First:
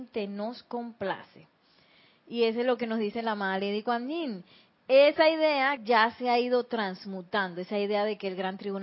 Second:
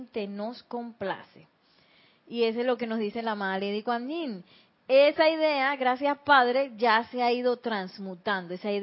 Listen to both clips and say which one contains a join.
first; 1 cut; at 5.8 s

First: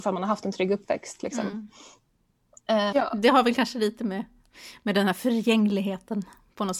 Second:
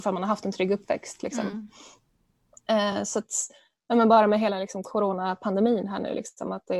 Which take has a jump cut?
first; 1 cut; at 2.9 s

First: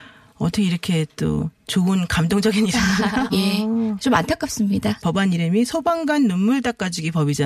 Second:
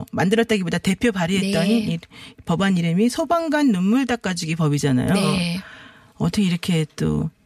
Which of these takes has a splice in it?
first; 2 cuts; at 3.3 s, 5.0 s

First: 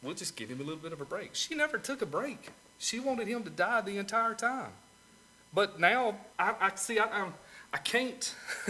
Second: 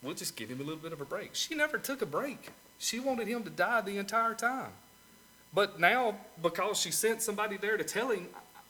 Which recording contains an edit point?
first; 1 cut; at 6.3 s

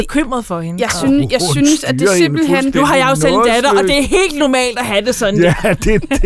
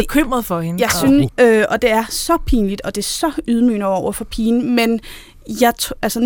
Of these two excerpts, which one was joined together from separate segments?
second; 1 cut; at 1.3 s

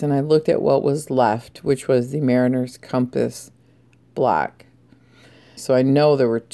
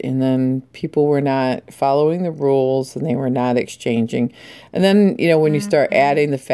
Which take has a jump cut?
first; 1 cut; at 5.6 s

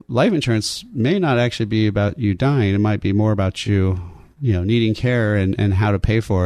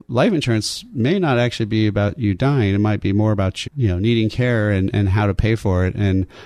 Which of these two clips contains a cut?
second; 1 cut; at 3.6 s

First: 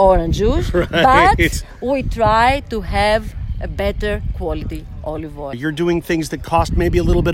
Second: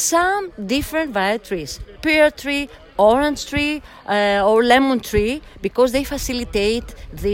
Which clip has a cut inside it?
first; 1 cut; at 5.5 s

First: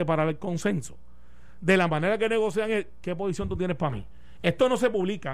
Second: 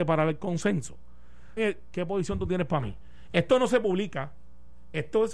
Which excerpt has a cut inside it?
second; 1 cut; at 1.6 s

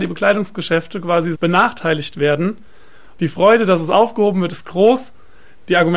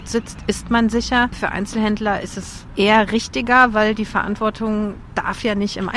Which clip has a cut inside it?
first; 2 cuts; at 1.3 s, 3.2 s

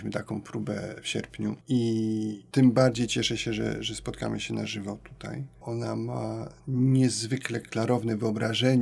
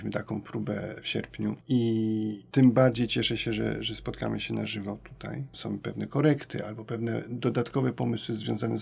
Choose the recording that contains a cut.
second; 1 cut; at 5.5 s

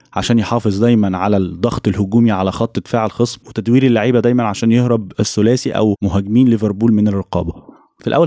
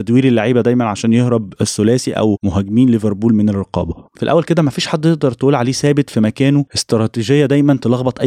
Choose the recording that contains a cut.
second; 1 cut; at 4.1 s

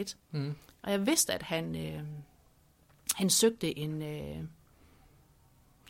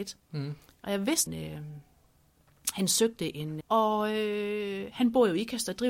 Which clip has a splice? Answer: second; 2 cuts; at 1.3 s, 3.6 s

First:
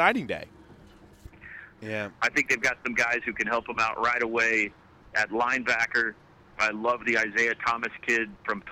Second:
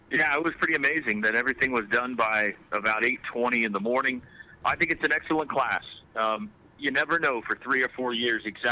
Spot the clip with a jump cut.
first; 1 cut; at 1.8 s

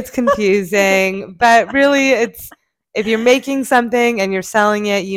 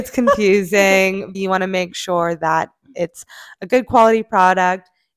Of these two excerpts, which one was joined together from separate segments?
second; 1 cut; at 1.3 s

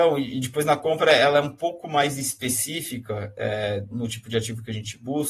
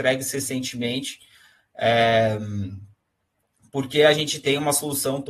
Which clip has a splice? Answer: first; 1 cut; at 3.9 s

